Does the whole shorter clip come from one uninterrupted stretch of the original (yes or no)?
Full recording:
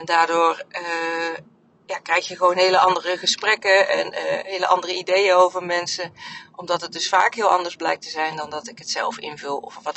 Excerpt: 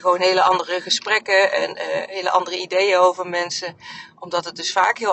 yes